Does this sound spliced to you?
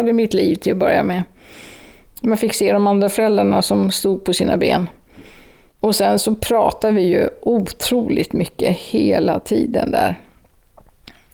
no; 0 cuts

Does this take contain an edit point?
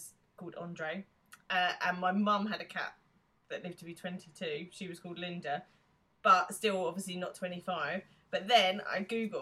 no; 0 cuts

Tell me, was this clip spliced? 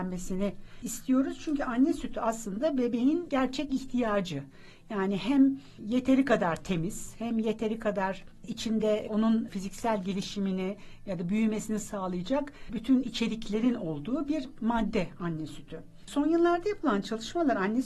yes; 1 cut; at 16.0 s

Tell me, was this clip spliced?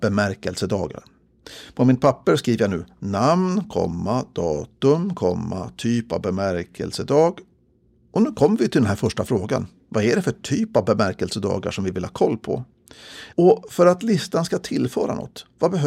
yes; 1 cut; at 13.3 s

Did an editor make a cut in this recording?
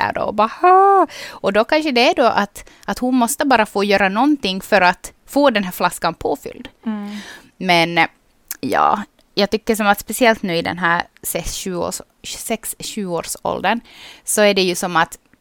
no; 0 cuts

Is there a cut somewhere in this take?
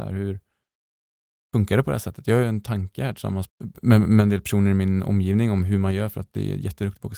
yes; 1 cut; at 3.5 s

